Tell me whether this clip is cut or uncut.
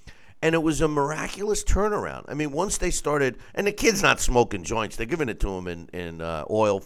uncut